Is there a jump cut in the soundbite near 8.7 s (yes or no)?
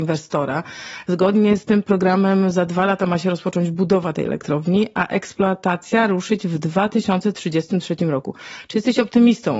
no